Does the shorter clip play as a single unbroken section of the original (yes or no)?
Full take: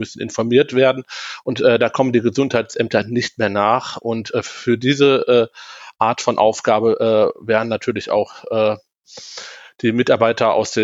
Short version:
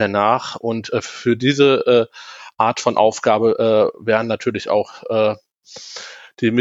yes